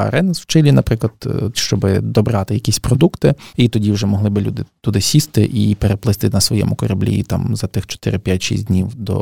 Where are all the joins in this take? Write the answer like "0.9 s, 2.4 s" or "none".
1.5 s